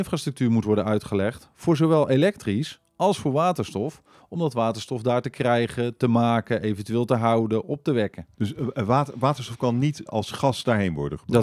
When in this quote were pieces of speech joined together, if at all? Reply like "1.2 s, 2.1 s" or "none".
8.3 s, 10.1 s